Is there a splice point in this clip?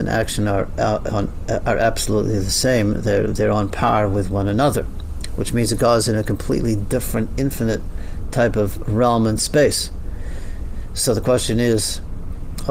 no; 0 cuts

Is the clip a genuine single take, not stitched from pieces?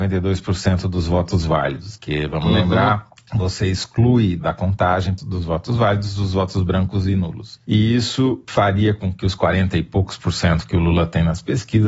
yes; 0 cuts

